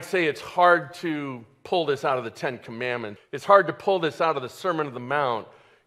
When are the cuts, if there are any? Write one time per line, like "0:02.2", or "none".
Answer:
0:03.2